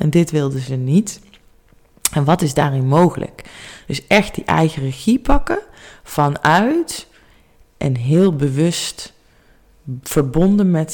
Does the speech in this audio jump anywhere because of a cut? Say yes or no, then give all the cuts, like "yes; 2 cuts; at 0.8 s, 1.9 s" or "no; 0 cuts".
no; 0 cuts